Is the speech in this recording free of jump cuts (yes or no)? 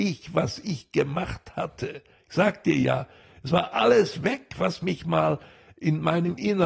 yes